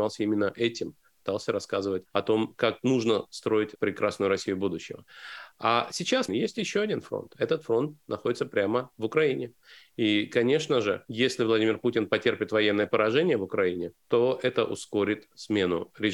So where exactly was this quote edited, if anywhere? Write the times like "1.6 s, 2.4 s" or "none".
6.3 s

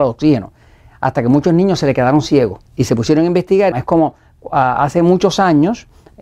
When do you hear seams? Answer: 2.7 s, 3.7 s

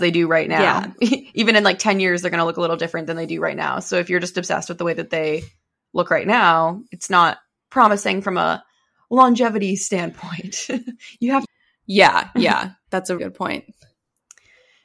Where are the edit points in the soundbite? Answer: 11.4 s, 13.2 s

